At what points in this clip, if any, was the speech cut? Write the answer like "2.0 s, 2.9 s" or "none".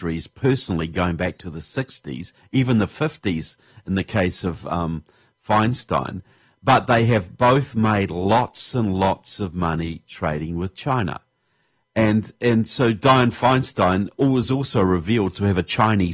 none